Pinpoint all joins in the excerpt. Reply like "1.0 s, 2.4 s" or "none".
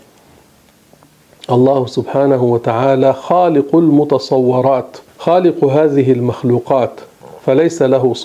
5.1 s